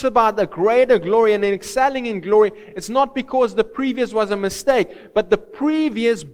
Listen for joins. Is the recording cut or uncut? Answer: uncut